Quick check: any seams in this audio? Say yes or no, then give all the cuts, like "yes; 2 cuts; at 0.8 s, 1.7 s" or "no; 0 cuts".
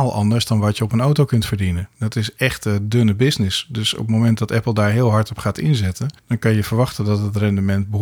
no; 0 cuts